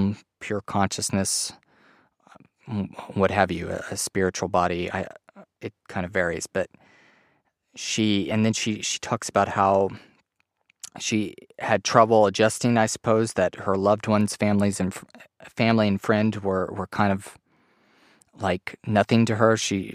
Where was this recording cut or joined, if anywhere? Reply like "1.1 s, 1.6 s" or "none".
none